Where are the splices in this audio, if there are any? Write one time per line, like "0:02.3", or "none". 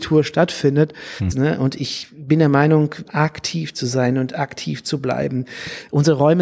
0:01.3
0:03.0